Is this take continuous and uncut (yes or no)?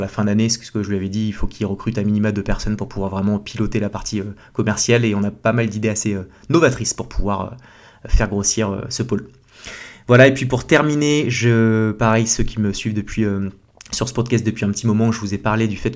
yes